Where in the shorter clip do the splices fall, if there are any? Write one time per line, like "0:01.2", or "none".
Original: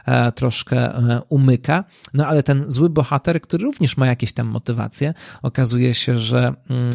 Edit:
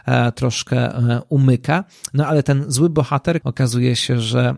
0:03.4